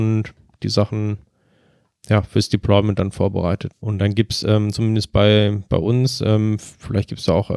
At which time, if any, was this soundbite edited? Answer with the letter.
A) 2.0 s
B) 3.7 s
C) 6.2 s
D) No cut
B